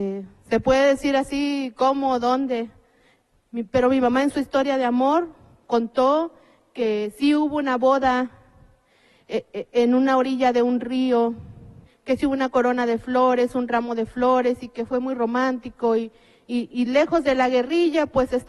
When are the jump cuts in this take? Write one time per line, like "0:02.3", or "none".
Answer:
0:11.9